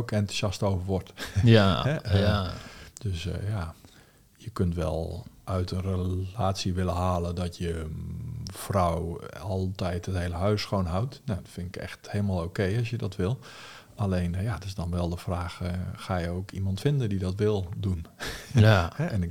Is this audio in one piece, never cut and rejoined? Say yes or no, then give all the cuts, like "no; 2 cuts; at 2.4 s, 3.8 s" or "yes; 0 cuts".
yes; 0 cuts